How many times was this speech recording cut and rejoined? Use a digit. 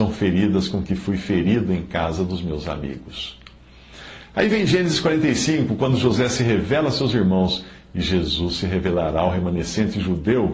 0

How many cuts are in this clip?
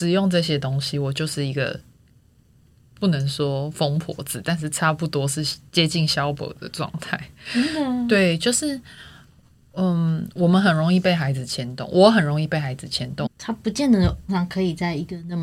2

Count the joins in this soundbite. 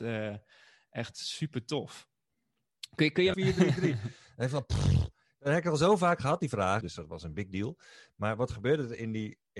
2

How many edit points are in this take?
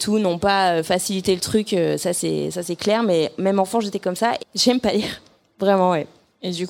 1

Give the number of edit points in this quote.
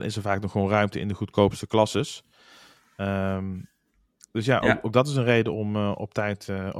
0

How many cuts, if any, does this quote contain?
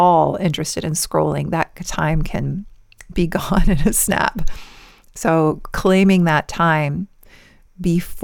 0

